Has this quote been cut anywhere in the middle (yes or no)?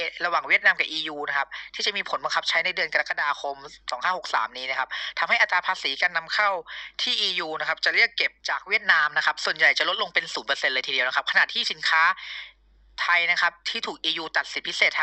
yes